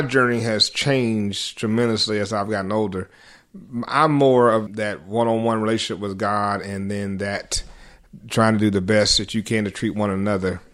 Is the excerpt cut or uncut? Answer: cut